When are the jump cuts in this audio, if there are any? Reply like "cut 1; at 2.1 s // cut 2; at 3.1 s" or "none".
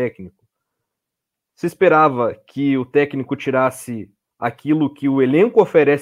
none